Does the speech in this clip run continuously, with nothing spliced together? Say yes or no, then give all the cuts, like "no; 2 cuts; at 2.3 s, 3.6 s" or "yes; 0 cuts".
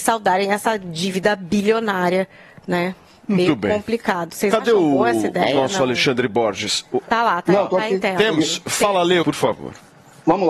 no; 2 cuts; at 7.0 s, 9.2 s